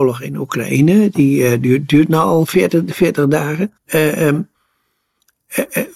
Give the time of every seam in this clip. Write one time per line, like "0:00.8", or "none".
0:03.8